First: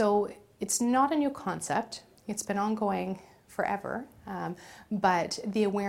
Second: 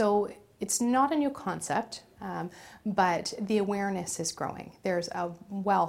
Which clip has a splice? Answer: second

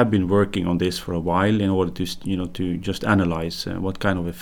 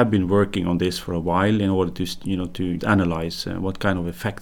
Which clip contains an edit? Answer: second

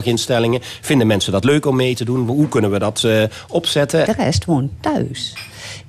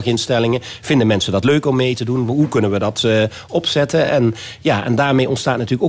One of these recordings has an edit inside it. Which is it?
first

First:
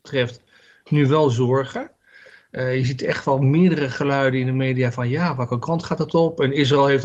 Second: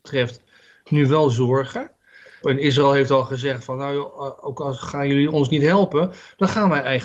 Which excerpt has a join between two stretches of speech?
second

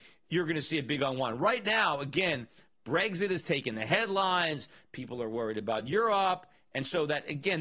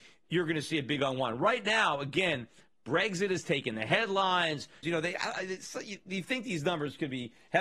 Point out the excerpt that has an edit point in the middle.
second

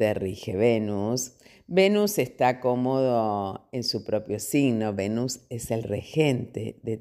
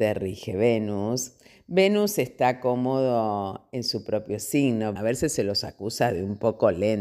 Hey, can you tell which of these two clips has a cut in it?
second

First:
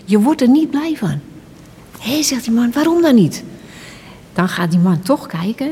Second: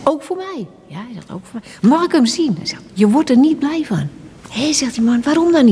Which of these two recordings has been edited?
second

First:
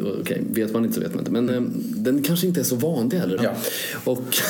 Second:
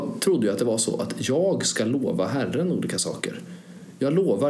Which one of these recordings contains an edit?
first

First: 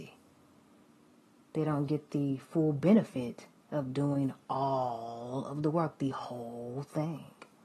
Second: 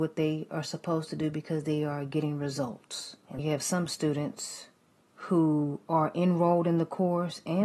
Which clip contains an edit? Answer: second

